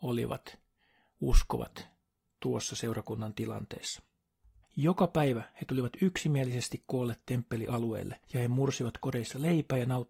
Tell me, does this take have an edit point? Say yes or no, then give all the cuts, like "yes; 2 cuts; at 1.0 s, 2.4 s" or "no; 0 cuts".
yes; 2 cuts; at 4.6 s, 8.2 s